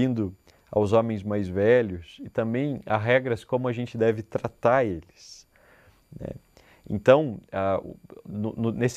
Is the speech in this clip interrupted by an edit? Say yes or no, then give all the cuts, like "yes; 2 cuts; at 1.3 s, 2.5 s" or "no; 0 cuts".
no; 0 cuts